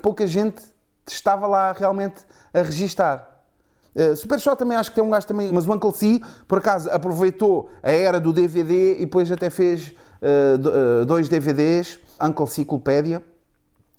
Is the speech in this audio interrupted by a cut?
yes; 3 cuts; at 3.8 s, 5.5 s, 12.2 s

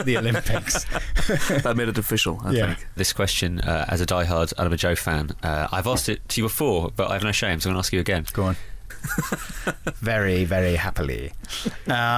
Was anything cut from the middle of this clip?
yes; 2 cuts; at 3.0 s, 8.9 s

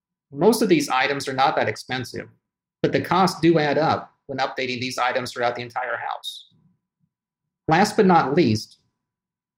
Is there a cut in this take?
no; 0 cuts

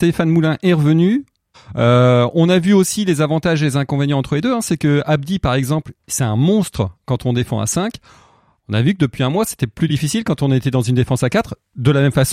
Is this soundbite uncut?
no; 1 cut; at 1.5 s

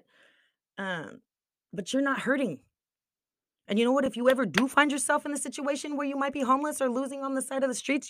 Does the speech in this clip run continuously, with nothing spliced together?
yes; 0 cuts

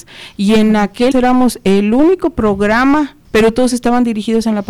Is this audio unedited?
no; 2 cuts; at 1.1 s, 3.2 s

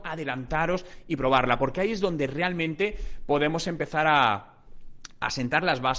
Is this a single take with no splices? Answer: yes; 0 cuts

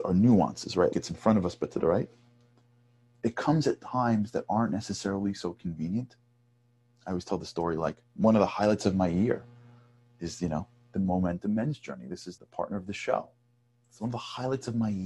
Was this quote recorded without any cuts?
no; 2 cuts; at 0.9 s, 12.4 s

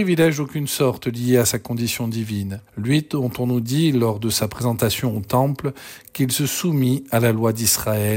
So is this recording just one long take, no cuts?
yes; 0 cuts

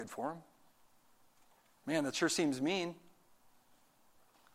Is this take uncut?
yes; 0 cuts

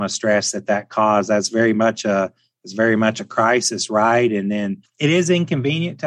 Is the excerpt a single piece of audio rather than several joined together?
yes; 0 cuts

